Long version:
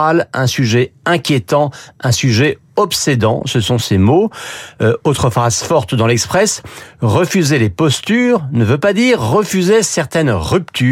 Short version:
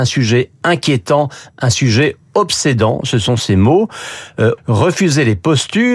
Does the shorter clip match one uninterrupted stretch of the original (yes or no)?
no